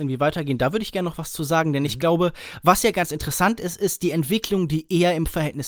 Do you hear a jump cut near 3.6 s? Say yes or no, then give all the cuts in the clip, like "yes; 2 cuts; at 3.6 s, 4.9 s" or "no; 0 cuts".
no; 0 cuts